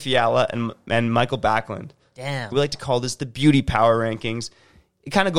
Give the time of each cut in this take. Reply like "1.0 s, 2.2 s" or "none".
2.5 s